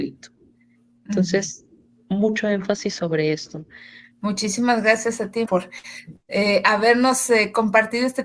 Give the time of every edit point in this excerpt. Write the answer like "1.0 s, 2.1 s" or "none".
4.1 s, 5.5 s